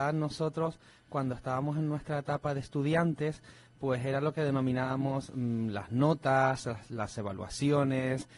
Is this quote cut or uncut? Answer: uncut